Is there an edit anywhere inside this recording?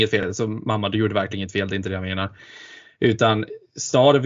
no; 0 cuts

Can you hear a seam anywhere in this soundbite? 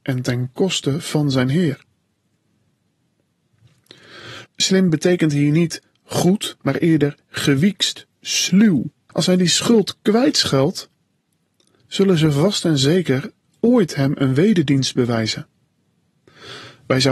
yes; 2 cuts; at 4.5 s, 9.1 s

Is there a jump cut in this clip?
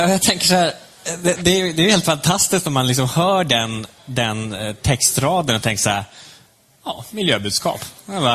no; 0 cuts

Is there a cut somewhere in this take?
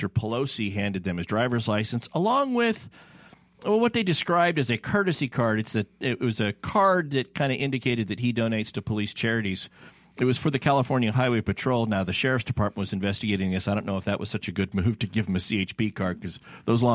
no; 0 cuts

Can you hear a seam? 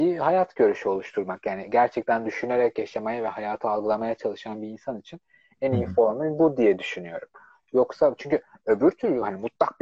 no; 0 cuts

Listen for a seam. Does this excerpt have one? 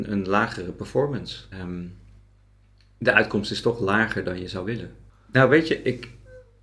yes; 2 cuts; at 1.5 s, 5.1 s

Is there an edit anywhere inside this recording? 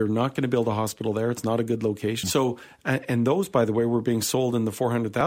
yes; 1 cut; at 2.2 s

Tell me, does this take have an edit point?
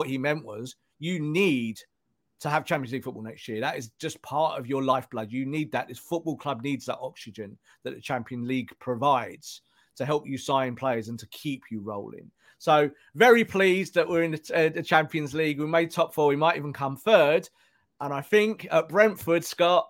no; 0 cuts

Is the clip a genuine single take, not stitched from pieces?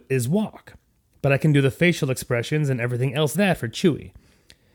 no; 1 cut; at 3.3 s

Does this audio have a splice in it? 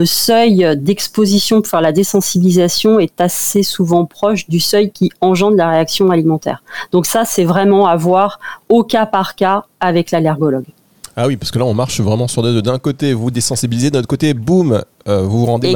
no; 0 cuts

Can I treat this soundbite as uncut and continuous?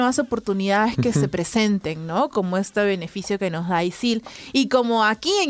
yes; 0 cuts

